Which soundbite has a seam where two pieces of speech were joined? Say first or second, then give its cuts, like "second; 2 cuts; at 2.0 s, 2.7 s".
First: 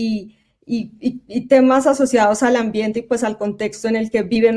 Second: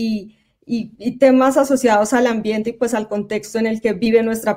second; 1 cut; at 1.0 s